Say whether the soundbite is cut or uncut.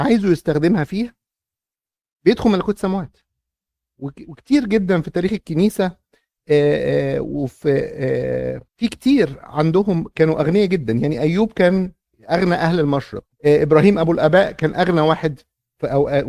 cut